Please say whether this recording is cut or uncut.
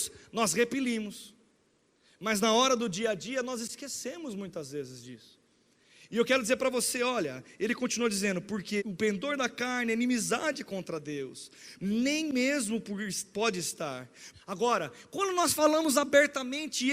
cut